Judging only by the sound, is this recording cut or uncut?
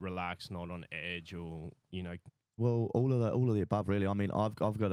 cut